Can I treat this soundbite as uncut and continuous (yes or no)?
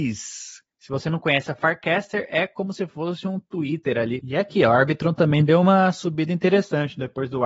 no